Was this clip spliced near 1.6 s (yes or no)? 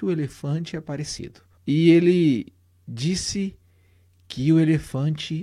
yes